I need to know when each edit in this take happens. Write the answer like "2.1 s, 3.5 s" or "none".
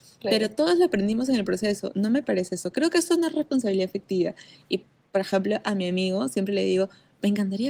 none

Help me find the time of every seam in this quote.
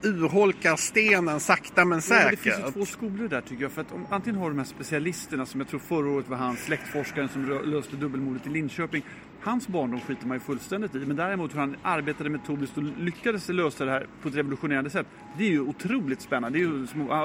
none

